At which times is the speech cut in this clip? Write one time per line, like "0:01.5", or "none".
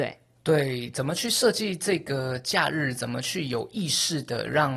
none

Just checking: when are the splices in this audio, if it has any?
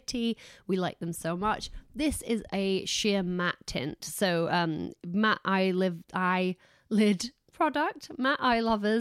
none

